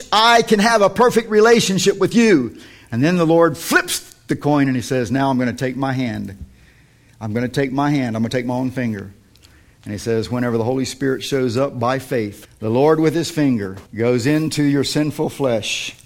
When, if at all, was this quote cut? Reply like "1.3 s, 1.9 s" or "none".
12.4 s, 13.9 s

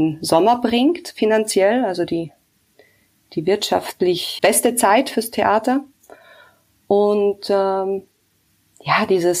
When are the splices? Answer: 4.4 s

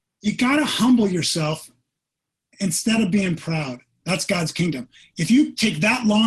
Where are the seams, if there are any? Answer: 4.0 s

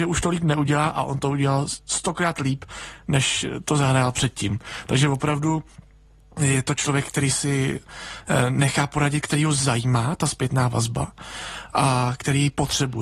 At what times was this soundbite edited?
none

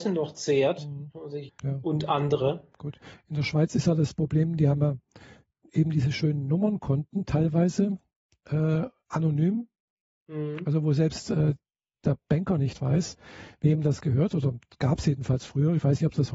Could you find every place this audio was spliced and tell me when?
1.5 s

